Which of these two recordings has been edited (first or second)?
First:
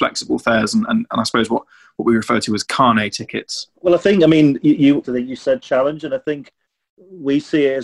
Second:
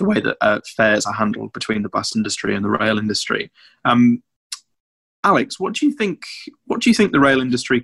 first